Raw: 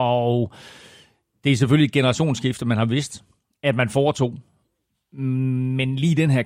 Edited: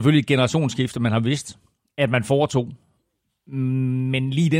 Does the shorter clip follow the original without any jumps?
yes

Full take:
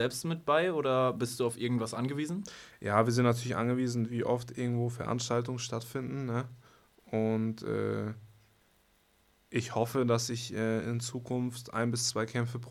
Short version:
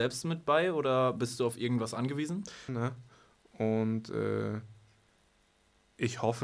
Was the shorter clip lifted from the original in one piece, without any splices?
no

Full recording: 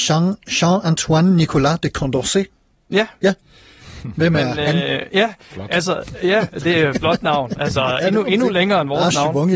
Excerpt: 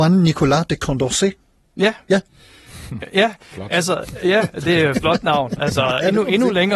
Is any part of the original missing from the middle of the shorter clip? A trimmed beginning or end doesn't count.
yes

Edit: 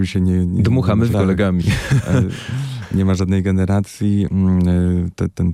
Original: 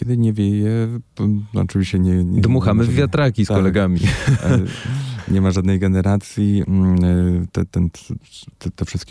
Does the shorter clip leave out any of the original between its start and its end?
yes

